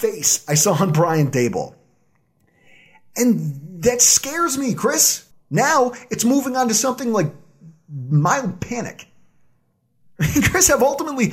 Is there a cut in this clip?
yes; 1 cut; at 5.3 s

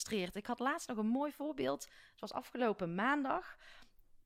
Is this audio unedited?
yes; 0 cuts

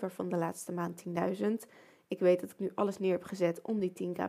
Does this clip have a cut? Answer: no; 0 cuts

